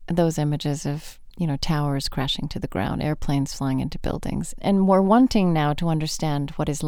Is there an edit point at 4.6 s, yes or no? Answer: yes